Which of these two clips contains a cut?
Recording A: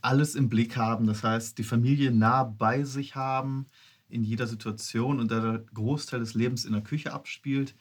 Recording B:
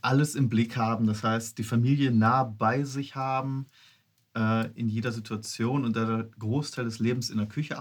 A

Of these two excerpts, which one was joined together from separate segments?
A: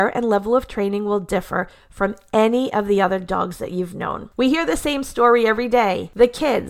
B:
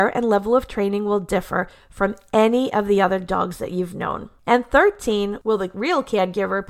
A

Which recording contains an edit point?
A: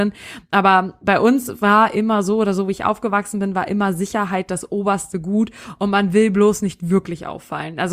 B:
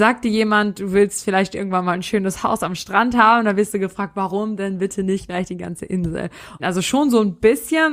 B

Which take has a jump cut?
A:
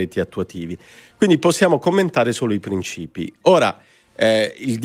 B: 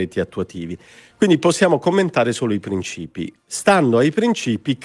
A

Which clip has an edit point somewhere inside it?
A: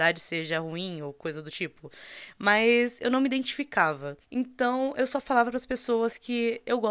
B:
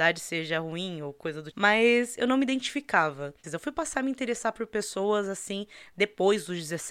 B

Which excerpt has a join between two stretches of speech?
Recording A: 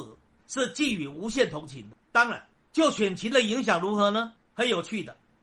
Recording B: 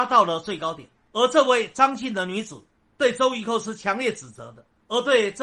B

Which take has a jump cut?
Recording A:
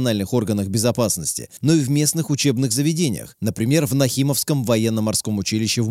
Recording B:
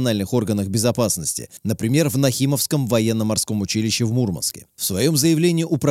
B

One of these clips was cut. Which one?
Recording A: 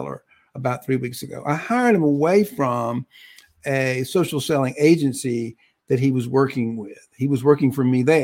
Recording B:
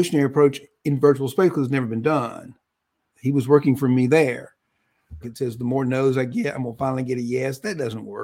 B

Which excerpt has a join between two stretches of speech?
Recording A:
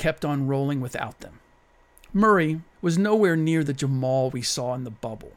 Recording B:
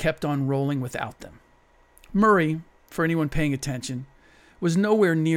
A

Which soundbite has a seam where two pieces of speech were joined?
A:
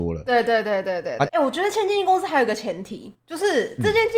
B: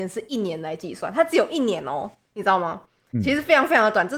A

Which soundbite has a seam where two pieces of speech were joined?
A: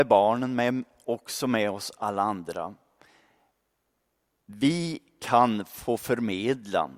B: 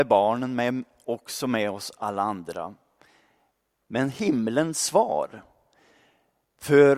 B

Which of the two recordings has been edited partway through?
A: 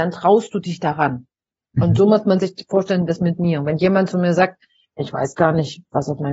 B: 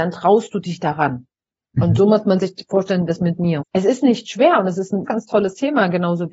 B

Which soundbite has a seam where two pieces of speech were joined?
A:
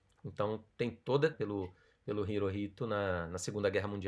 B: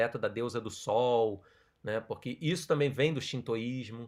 A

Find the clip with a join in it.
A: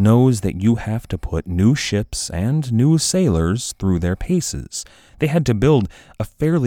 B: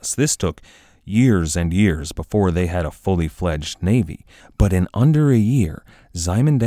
A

